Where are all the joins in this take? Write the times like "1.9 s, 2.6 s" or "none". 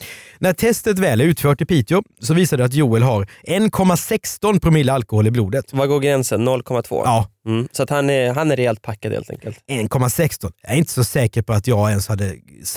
none